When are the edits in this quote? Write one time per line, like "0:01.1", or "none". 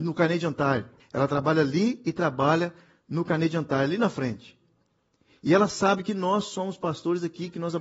0:01.0